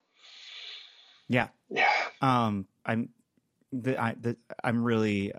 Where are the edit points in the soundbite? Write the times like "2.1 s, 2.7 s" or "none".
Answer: none

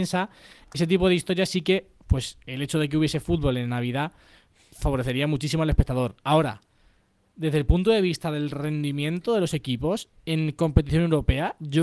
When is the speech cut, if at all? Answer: none

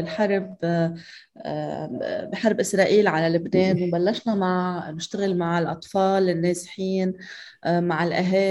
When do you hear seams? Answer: none

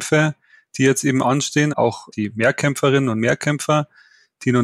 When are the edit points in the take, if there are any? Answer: 1.7 s

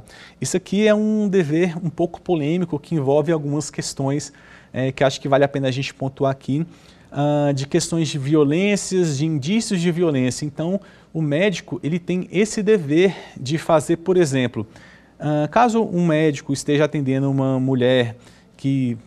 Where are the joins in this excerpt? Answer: none

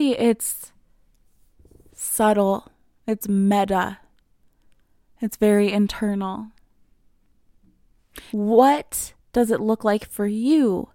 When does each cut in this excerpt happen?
8.3 s

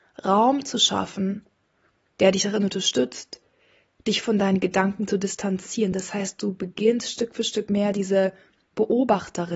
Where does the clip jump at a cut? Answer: none

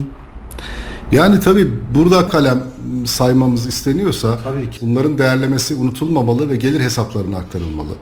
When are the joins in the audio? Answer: 2.3 s, 4.8 s

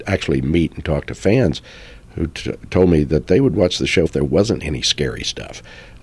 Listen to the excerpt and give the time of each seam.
4.0 s

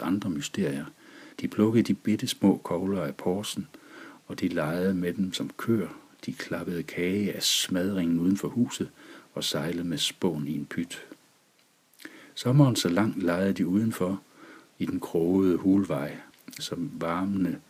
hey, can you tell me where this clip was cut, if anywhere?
1.3 s, 16.6 s

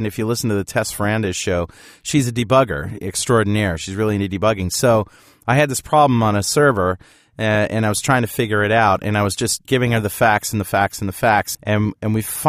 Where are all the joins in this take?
9.7 s, 11.5 s

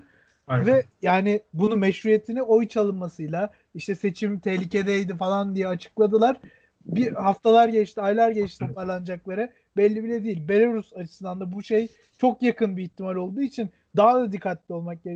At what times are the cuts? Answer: 8.6 s

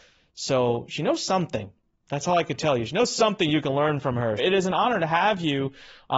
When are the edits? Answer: 4.4 s

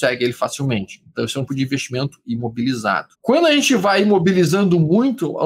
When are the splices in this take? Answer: 1.5 s, 3.1 s

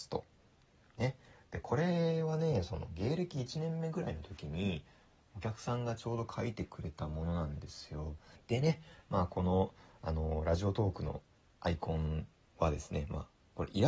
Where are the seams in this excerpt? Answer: 8.4 s, 11.6 s

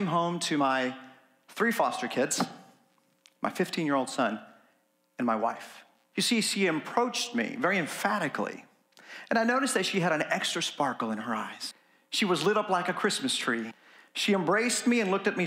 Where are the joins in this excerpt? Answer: 6.1 s

